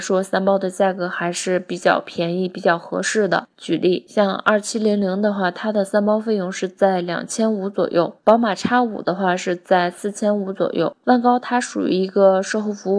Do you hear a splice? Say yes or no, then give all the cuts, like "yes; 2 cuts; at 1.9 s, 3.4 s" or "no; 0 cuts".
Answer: yes; 2 cuts; at 3.5 s, 11.0 s